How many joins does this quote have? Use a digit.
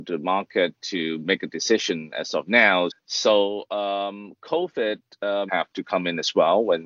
2